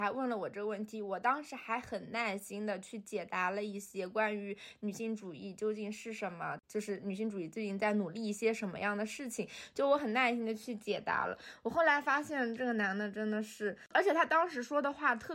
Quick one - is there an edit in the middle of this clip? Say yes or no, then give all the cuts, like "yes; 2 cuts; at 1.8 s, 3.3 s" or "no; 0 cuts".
no; 0 cuts